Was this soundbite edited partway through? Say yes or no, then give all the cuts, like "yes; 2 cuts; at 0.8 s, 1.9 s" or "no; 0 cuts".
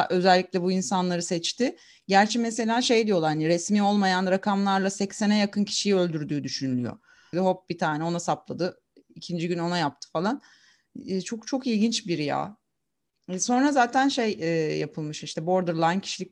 yes; 1 cut; at 7.3 s